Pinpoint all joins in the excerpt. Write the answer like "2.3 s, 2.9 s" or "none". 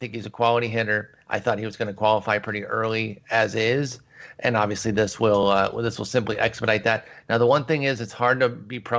none

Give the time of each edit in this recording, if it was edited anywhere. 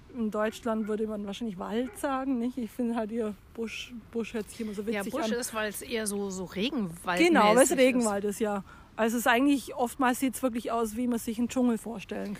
none

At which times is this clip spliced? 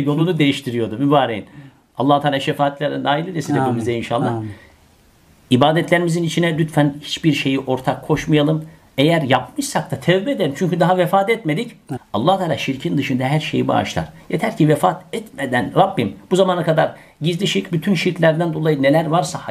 12.0 s, 17.7 s

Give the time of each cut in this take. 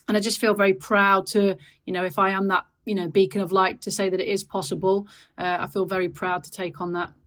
none

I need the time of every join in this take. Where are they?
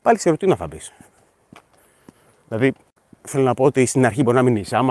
none

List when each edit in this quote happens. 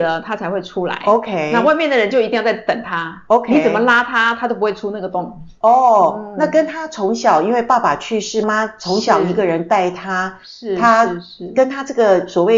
8.4 s

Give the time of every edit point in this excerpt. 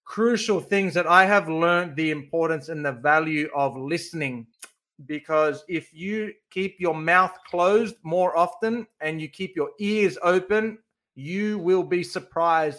none

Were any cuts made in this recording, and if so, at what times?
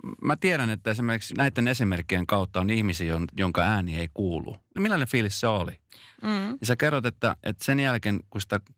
1.3 s, 4.8 s, 6.1 s

